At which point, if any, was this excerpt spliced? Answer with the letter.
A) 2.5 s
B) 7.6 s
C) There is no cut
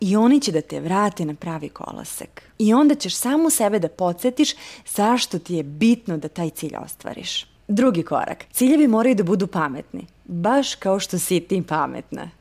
C